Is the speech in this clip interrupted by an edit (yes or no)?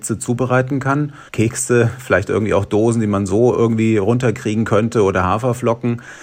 yes